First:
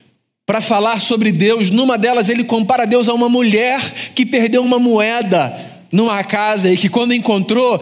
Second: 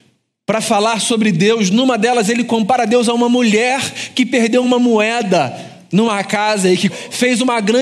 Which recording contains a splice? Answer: second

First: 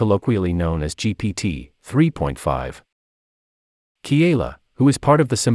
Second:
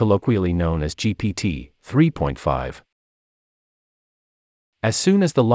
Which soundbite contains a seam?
first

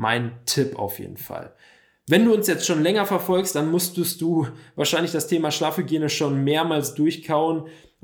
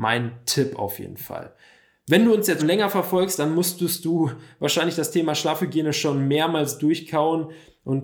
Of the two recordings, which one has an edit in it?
second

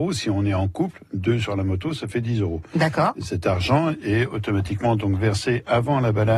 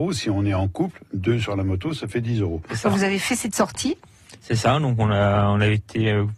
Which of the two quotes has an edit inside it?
second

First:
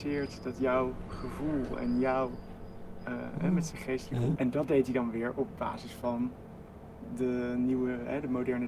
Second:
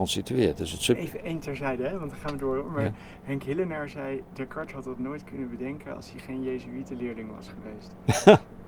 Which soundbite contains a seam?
first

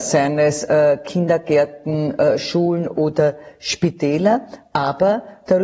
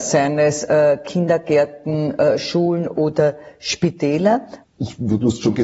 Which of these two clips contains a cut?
second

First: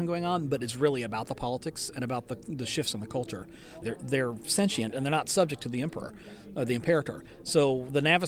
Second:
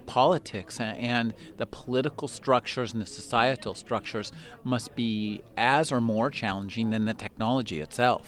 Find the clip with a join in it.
first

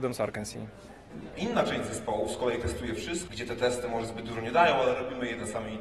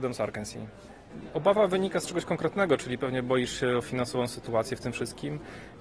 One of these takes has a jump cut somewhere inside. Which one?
first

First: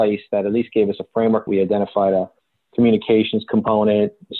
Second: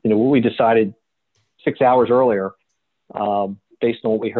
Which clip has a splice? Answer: first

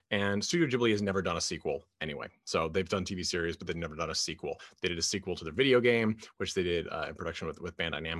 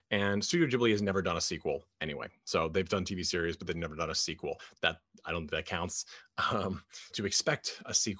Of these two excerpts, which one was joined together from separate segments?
second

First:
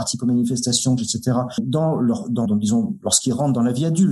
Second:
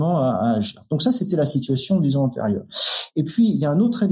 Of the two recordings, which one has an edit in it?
first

